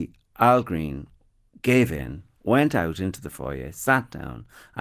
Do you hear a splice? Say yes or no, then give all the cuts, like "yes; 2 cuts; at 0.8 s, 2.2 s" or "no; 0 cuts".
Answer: no; 0 cuts